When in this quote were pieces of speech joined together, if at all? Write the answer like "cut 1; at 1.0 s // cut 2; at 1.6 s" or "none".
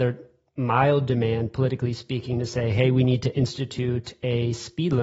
none